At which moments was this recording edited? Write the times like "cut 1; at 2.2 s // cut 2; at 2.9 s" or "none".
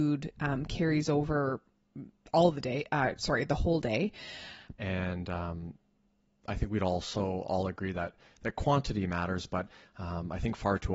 cut 1; at 4.7 s